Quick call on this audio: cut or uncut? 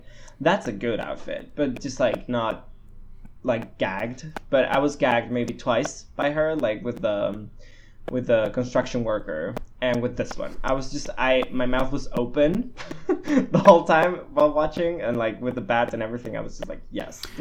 uncut